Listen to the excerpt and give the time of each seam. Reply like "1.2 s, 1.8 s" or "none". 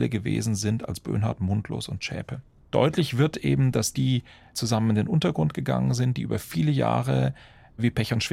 2.7 s, 3.9 s

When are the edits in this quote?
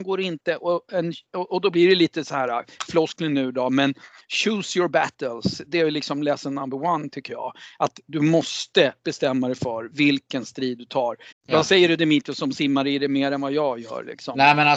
11.3 s

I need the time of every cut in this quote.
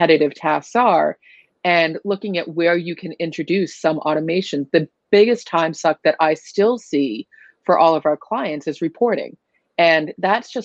none

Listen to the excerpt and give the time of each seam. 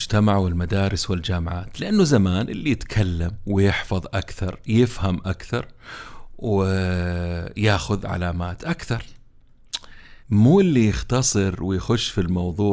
10.2 s

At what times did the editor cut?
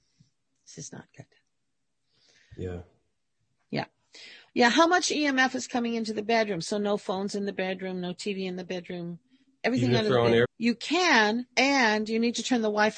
4.5 s, 10.4 s, 11.5 s

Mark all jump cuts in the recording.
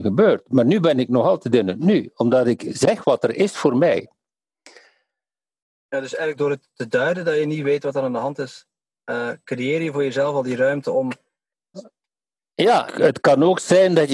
11.7 s, 12.9 s

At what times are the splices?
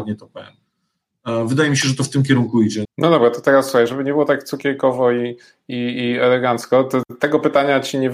2.8 s

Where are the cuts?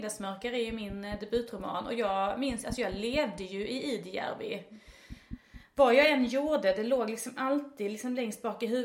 none

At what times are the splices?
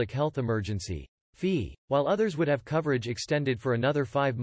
1.8 s

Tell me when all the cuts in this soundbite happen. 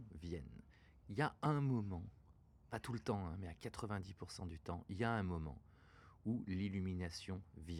1.0 s

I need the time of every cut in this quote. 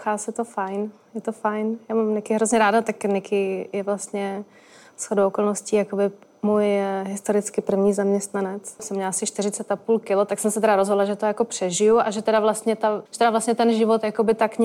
8.8 s, 13.1 s

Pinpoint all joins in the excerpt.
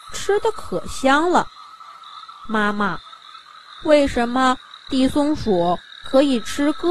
none

